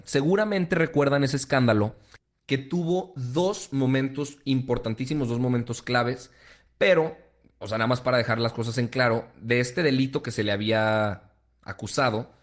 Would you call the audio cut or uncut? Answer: uncut